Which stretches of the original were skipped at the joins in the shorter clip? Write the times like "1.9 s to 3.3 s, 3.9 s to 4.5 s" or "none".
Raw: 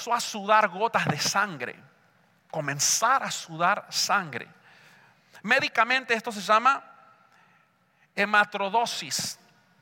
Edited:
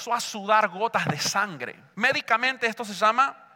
1.9 s to 5.4 s